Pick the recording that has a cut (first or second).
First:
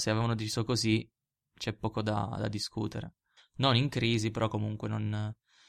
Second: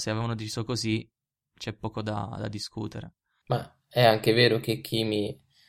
first